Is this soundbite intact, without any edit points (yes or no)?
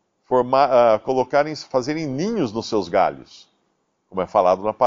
yes